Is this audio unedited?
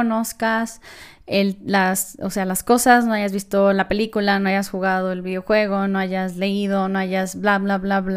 yes; 0 cuts

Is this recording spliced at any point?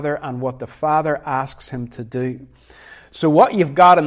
no; 0 cuts

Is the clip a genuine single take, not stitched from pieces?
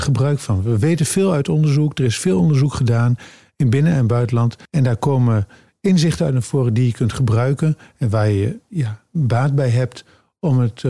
no; 1 cut; at 4.7 s

